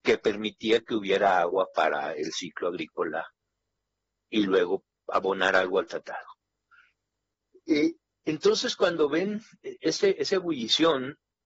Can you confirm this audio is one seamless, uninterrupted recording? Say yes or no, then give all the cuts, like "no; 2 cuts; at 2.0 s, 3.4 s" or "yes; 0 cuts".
yes; 0 cuts